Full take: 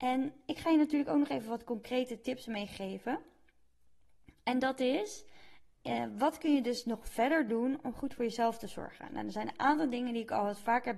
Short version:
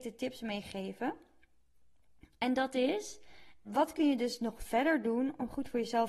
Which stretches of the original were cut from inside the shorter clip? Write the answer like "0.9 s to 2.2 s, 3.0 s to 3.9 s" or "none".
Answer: 5.7 s to 6.1 s

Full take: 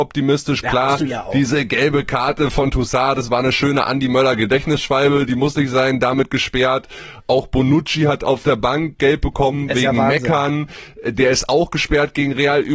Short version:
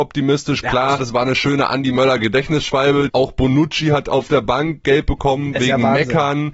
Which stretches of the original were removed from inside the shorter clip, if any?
1.0 s to 3.1 s, 5.3 s to 7.2 s

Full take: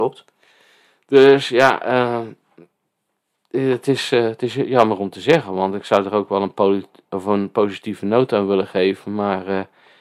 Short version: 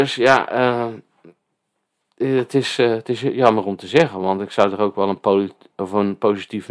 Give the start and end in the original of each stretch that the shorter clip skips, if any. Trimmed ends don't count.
none

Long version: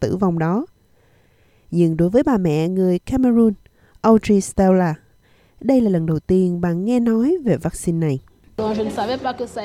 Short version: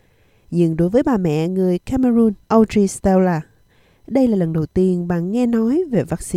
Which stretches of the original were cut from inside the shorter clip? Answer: 3.6 s to 4.0 s

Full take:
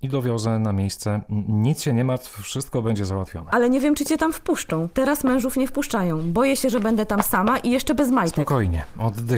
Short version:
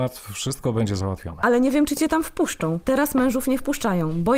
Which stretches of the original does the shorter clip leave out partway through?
none

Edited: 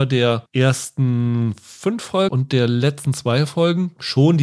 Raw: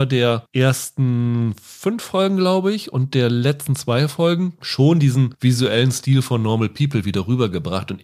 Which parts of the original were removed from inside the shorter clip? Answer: 2.3 s to 2.9 s

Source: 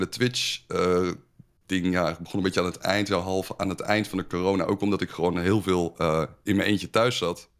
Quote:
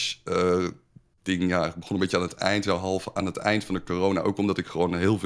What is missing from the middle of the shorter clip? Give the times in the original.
none

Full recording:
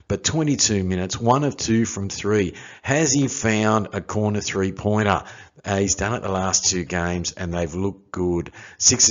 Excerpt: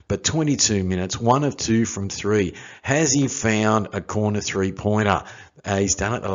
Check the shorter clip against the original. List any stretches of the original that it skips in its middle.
none

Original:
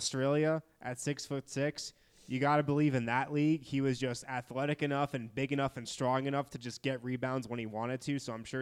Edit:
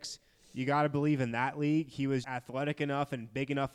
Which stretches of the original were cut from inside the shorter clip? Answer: 4.0 s to 4.3 s

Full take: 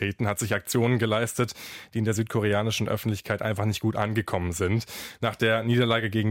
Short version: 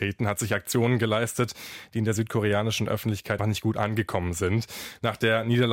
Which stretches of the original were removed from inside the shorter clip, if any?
3.4 s to 3.6 s

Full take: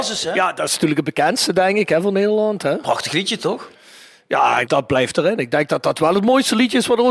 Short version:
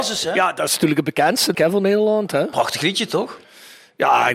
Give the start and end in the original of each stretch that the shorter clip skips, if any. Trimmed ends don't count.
1.5 s to 1.9 s

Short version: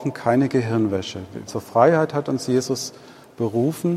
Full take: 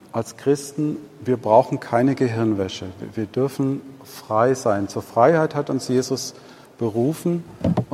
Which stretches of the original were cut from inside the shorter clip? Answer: 3.1 s to 4.9 s

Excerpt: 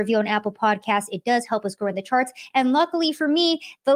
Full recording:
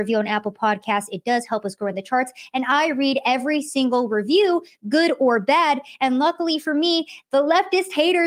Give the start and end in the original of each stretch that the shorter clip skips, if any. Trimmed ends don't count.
2.5 s to 6.0 s

